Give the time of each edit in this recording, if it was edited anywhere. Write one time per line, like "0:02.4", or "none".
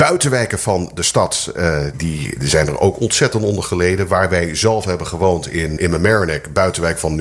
0:01.9
0:05.8